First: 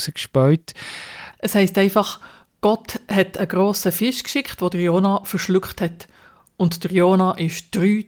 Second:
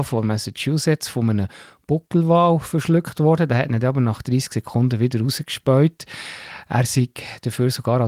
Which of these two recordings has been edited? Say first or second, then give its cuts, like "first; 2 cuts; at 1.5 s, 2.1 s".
first; 1 cut; at 1.3 s